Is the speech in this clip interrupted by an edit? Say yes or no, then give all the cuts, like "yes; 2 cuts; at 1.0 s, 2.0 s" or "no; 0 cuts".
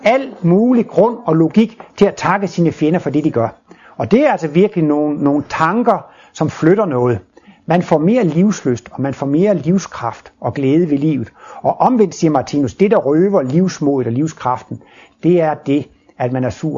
no; 0 cuts